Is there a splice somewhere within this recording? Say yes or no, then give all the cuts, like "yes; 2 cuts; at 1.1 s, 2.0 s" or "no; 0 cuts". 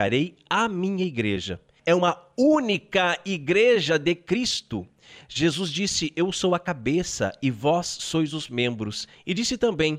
yes; 1 cut; at 1.8 s